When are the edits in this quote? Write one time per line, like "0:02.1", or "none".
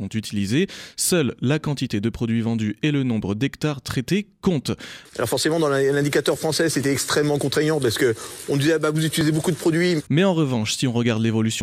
0:05.0
0:10.1